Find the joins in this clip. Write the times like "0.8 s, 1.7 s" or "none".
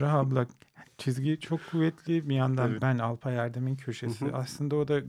2.7 s